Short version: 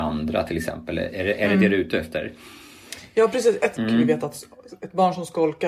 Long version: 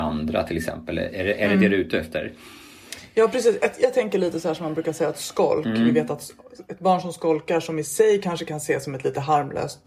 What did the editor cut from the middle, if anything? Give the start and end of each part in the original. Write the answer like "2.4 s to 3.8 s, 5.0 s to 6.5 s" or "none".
3.8 s to 5.6 s